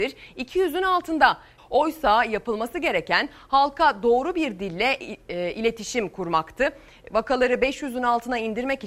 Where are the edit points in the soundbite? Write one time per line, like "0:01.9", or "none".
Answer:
0:01.6